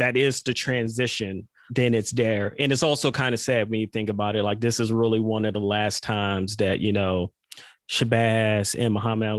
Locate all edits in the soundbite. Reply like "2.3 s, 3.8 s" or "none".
1.7 s